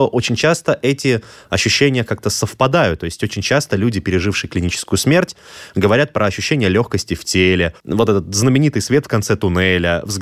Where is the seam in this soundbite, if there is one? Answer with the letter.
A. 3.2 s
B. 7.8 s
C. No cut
B